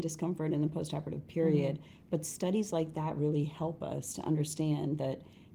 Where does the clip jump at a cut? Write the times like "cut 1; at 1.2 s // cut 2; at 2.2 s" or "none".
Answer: none